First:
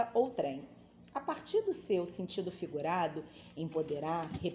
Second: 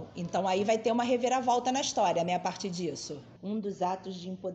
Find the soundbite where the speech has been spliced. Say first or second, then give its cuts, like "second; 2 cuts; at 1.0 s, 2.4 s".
second; 1 cut; at 3.4 s